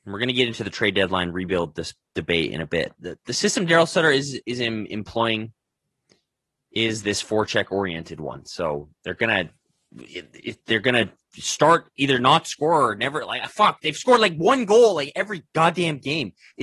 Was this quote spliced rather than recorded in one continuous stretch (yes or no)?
yes